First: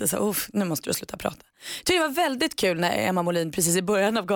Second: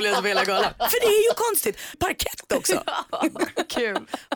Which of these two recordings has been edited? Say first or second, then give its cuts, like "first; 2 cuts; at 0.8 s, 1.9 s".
second; 1 cut; at 1.9 s